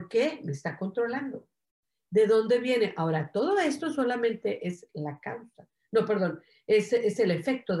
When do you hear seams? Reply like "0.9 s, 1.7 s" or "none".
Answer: none